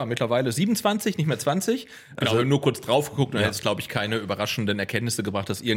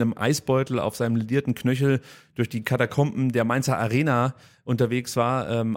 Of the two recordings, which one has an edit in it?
first; 1 cut; at 2.2 s

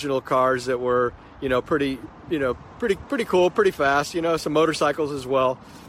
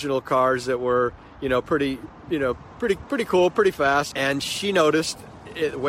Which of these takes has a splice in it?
second; 1 cut; at 4.1 s

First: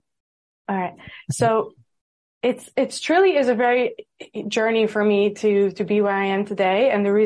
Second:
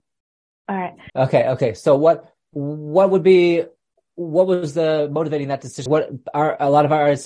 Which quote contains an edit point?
second; 2 cuts; at 1.1 s, 5.9 s

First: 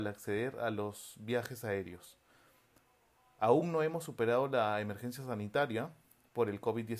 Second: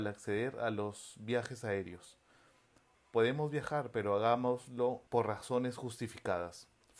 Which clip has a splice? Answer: second; 2 cuts; at 2.9 s, 5.1 s

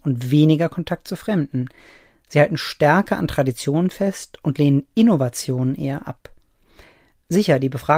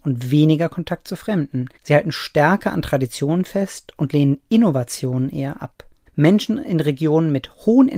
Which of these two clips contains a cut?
second; 2 cuts; at 1.7 s, 6.1 s

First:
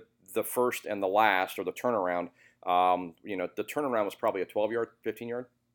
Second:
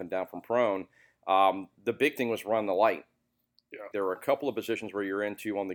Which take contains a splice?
second; 1 cut; at 3.9 s

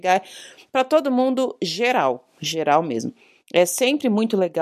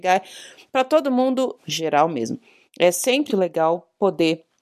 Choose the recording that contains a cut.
second; 2 cuts; at 1.6 s, 3.3 s

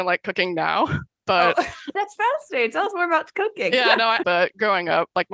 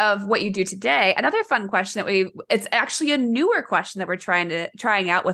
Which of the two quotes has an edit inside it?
first; 2 cuts; at 2.0 s, 4.2 s

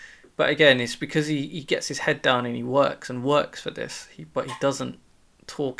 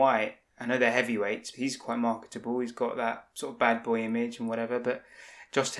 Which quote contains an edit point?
second; 1 cut; at 1.5 s

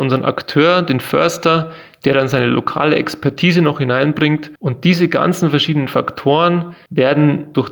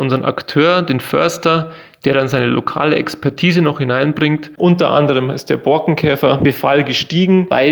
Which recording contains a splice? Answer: second; 1 cut; at 4.6 s

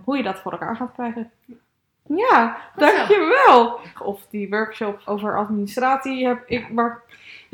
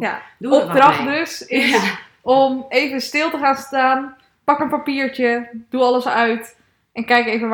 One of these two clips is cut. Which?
first; 2 cuts; at 3.9 s, 5.1 s

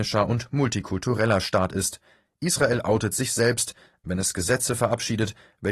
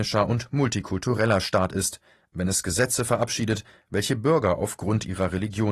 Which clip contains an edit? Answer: second; 1 cut; at 2.2 s

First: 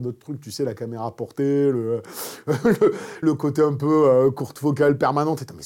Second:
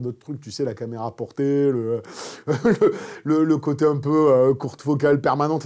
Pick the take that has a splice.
first; 1 cut; at 3.2 s

